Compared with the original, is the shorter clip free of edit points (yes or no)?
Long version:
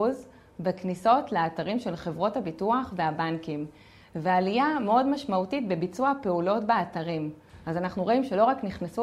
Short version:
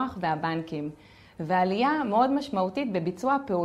yes